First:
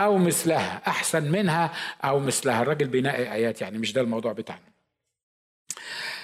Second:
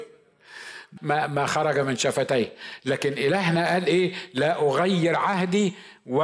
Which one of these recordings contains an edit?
second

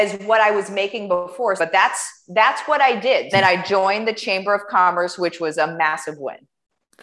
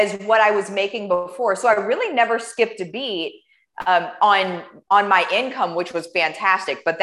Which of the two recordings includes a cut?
first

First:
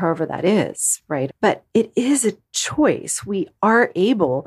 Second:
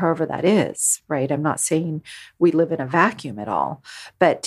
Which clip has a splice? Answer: first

